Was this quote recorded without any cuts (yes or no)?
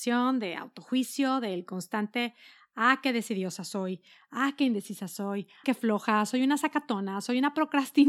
no